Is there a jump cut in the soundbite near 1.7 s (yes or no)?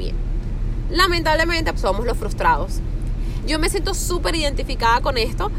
yes